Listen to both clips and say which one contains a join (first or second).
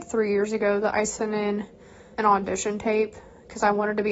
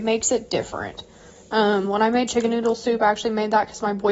first